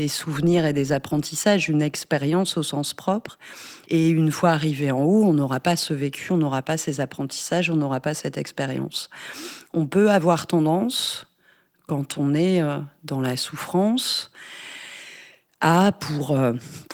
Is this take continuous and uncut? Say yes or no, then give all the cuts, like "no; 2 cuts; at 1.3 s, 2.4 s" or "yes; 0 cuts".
no; 1 cut; at 3.8 s